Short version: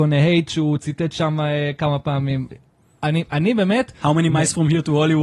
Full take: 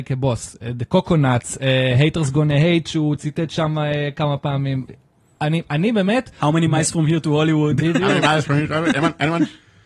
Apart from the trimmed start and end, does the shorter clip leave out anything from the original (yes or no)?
no